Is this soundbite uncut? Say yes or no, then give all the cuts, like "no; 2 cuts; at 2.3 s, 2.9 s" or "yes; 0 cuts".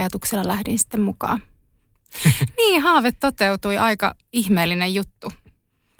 no; 1 cut; at 2.0 s